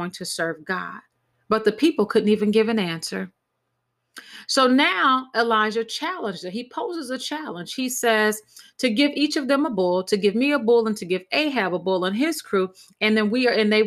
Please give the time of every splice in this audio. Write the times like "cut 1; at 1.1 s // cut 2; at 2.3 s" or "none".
none